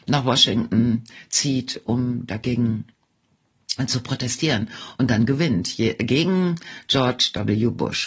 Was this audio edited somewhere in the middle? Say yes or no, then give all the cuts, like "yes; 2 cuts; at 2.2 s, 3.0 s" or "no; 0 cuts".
no; 0 cuts